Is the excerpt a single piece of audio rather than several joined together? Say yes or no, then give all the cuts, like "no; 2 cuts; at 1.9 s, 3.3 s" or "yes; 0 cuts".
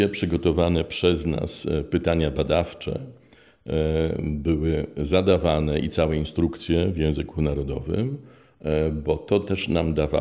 yes; 0 cuts